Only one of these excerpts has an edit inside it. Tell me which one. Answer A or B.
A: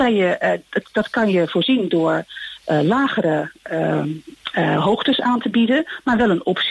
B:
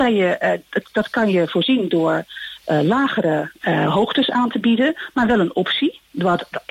B